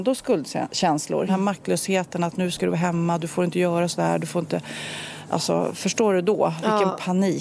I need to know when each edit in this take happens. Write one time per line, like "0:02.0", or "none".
0:01.3